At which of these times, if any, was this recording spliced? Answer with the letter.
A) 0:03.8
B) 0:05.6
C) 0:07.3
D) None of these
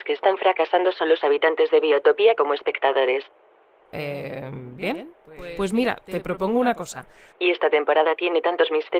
C